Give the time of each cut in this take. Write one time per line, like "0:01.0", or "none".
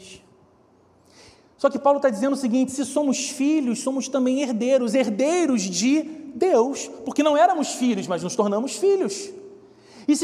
none